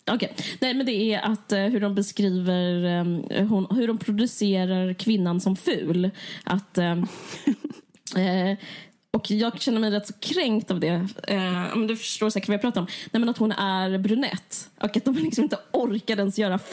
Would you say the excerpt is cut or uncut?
uncut